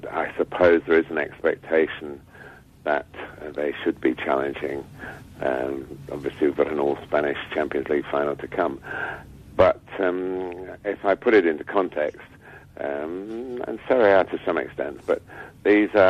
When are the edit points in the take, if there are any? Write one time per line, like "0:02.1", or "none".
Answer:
0:12.6

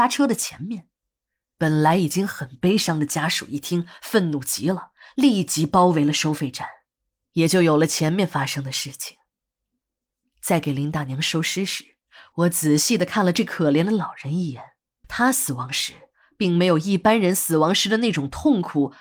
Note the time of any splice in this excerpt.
0:01.5
0:10.2
0:15.0

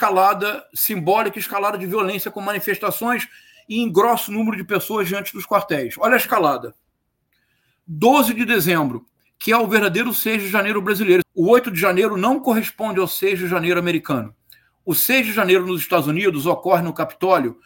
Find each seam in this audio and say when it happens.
0:11.2

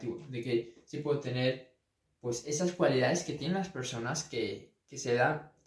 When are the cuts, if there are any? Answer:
none

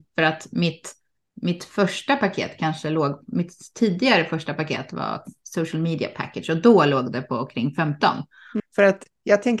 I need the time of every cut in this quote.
0:08.6

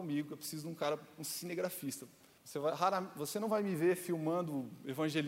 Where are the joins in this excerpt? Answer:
0:02.4

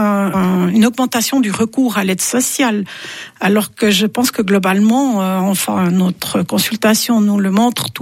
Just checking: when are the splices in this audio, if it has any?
none

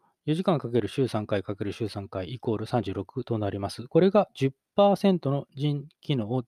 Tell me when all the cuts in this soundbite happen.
none

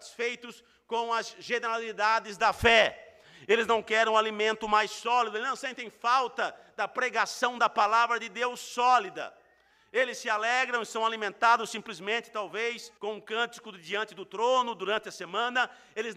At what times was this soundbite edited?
0:13.0

